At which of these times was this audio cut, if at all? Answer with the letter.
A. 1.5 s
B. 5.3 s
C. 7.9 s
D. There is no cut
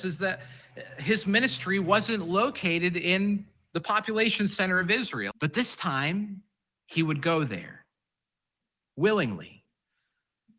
B